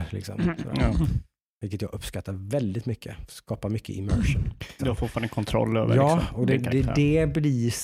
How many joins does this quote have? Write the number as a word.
one